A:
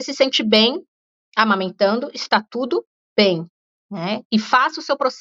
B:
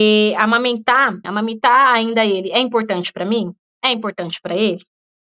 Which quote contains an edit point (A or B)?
B